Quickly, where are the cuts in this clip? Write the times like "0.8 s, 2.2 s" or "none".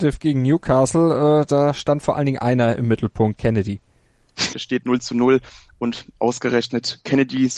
4.5 s